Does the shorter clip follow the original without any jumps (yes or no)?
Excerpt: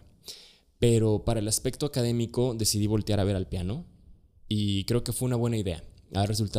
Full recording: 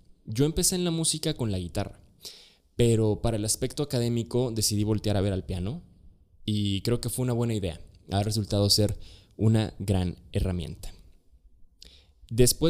yes